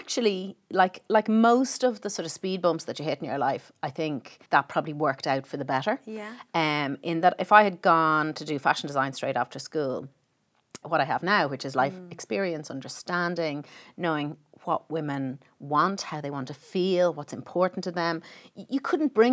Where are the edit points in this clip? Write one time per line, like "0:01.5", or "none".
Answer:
0:04.5
0:10.8